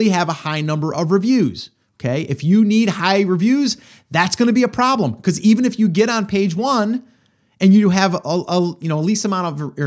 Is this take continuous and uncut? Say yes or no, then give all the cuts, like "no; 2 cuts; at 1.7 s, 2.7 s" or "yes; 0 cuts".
yes; 0 cuts